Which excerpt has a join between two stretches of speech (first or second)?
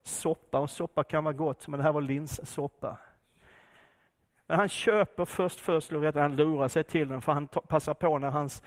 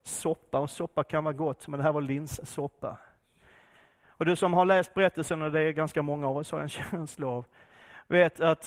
second